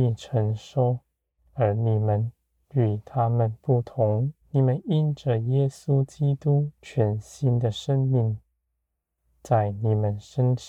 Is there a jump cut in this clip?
yes; 3 cuts; at 1.4 s, 4.4 s, 6.8 s

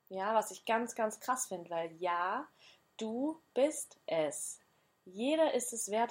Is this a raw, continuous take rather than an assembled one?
yes; 0 cuts

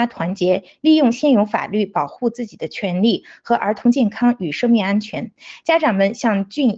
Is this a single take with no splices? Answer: yes; 0 cuts

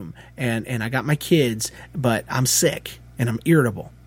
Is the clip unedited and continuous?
yes; 0 cuts

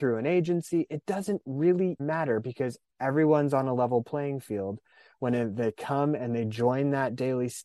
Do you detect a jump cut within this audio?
yes; 1 cut; at 2.0 s

